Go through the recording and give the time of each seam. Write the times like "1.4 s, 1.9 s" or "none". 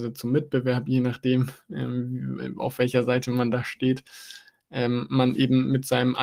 none